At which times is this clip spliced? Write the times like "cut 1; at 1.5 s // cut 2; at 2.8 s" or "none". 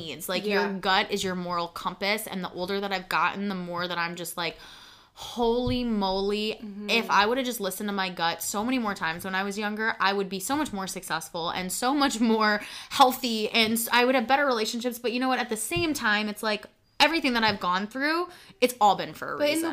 none